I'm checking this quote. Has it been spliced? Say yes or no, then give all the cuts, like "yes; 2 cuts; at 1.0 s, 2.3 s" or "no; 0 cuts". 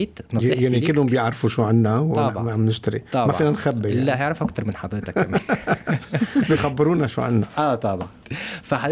no; 0 cuts